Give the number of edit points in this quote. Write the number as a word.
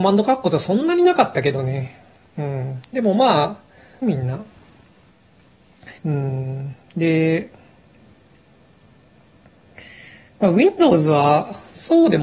two